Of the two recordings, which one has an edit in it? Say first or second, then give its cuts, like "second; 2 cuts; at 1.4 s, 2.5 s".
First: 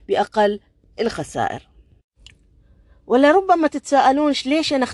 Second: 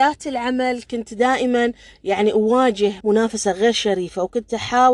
second; 1 cut; at 3.0 s